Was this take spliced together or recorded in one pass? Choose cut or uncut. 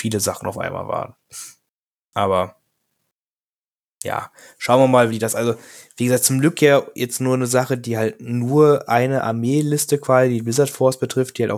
uncut